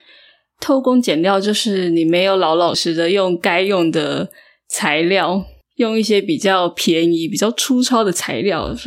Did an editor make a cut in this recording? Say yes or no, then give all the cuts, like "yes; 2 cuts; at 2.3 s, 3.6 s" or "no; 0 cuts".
yes; 1 cut; at 2.7 s